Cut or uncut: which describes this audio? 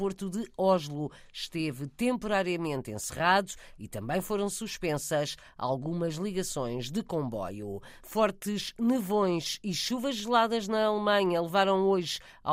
cut